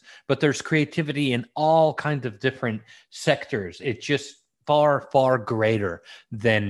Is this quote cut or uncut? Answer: uncut